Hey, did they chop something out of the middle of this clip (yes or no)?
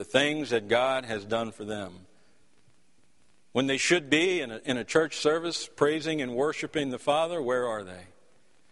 no